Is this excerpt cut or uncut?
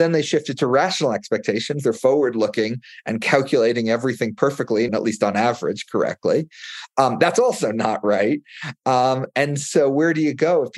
cut